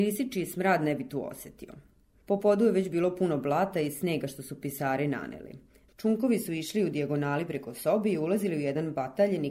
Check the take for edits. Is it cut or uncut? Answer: cut